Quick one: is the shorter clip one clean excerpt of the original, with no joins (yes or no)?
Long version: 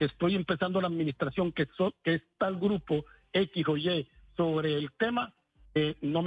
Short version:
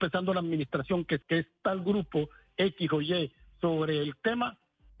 no